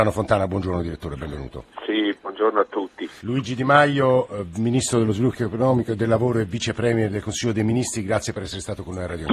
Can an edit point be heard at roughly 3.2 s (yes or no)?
yes